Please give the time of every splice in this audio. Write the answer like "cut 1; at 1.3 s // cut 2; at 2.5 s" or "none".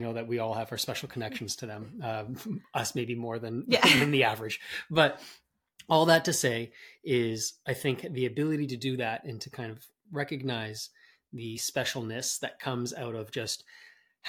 none